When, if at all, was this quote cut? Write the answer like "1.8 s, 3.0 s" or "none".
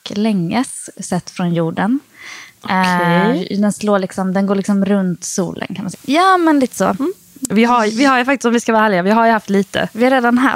5.9 s, 7.5 s